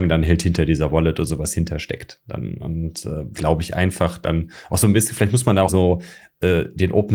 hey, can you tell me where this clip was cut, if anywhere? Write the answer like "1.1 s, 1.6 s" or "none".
3.3 s, 5.7 s